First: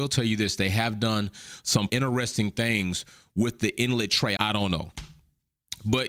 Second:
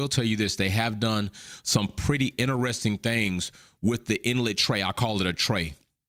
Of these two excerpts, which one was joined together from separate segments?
first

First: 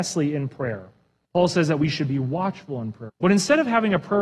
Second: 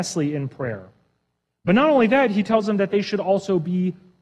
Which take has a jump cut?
first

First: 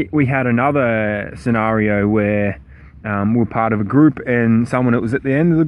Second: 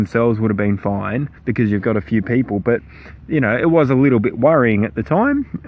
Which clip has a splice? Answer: second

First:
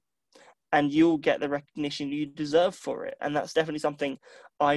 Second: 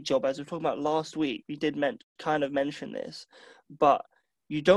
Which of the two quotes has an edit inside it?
first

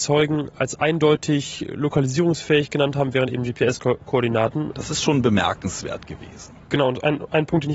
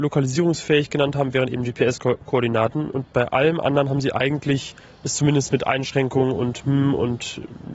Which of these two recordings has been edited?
first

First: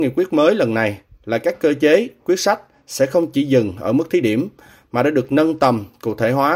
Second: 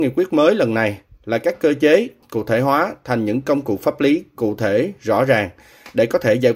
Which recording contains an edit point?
second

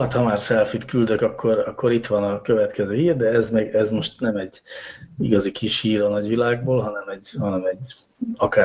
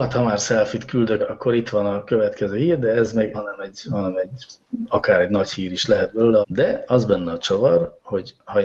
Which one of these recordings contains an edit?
second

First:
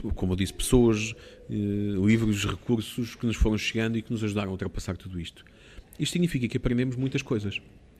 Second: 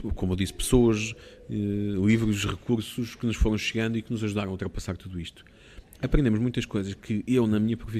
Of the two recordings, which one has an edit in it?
second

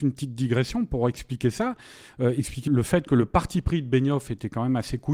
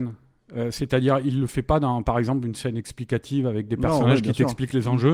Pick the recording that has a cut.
first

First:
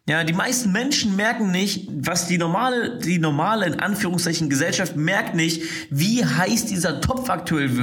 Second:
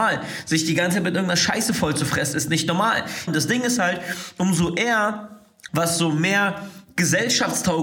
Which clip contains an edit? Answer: second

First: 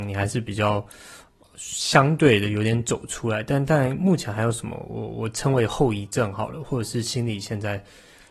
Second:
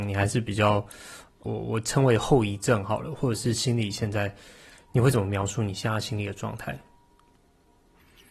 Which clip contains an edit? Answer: second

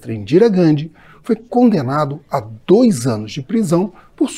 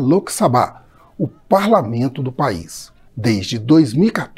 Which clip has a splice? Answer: second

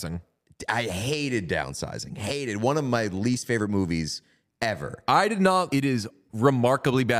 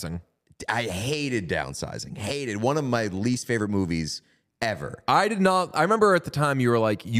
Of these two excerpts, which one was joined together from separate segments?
first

